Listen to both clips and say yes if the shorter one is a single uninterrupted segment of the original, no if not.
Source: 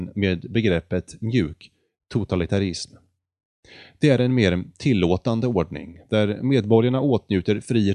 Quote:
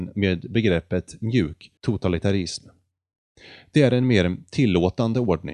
no